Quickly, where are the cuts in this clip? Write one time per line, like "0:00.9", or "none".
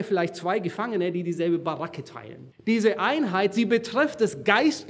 0:02.5